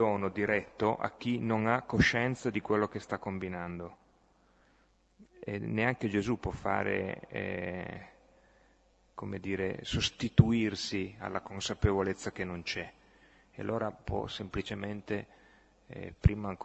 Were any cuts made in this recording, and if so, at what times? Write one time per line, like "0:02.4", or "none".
none